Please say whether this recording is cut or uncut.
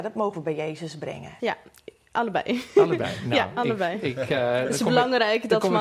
cut